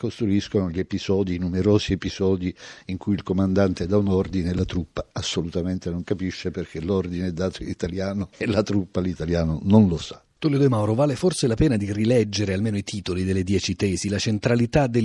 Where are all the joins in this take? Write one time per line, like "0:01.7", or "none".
none